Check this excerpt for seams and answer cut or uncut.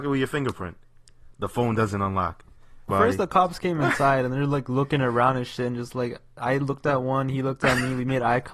cut